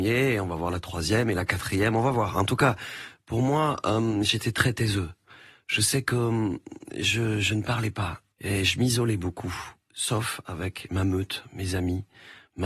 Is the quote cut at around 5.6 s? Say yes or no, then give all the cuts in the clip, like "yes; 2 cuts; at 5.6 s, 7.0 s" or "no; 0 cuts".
no; 1 cut; at 8.3 s